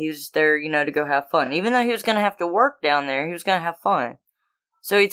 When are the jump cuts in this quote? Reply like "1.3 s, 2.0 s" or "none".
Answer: none